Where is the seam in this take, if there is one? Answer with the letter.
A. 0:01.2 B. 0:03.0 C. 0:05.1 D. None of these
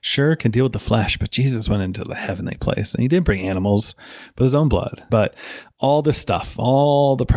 C